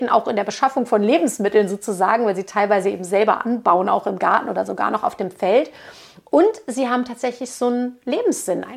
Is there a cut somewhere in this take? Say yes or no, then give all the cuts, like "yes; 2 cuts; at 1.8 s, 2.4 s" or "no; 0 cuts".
no; 0 cuts